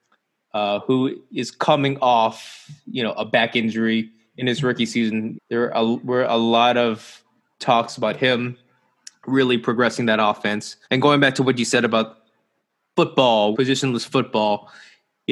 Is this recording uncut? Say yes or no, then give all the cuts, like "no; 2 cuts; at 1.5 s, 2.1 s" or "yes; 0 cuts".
no; 3 cuts; at 5.3 s, 10.8 s, 13.5 s